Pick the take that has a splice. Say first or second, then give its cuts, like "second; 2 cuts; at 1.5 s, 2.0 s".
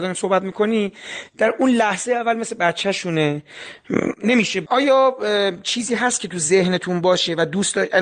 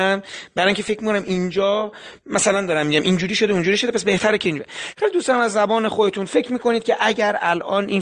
first; 1 cut; at 4.7 s